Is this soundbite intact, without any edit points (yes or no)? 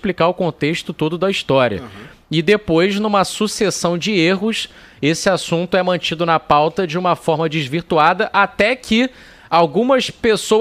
yes